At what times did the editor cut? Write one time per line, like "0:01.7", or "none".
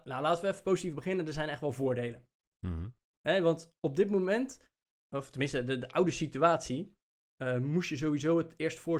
none

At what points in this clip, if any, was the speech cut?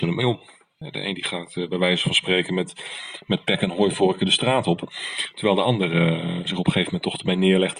none

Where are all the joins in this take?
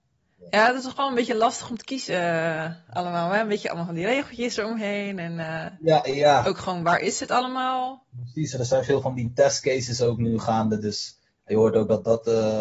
none

